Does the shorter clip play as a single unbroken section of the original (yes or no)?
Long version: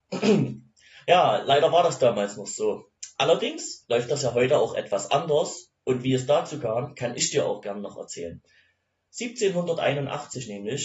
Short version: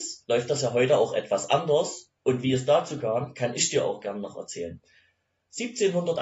yes